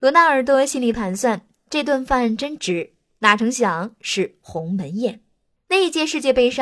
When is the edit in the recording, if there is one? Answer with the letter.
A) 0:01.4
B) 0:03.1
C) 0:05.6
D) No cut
C